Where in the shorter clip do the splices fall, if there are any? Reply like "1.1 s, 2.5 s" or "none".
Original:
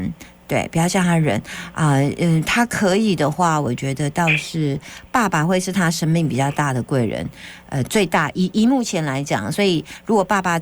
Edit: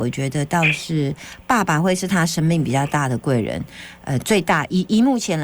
none